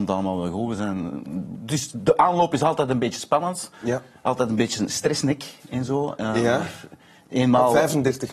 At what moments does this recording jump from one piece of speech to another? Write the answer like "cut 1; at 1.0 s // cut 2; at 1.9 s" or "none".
none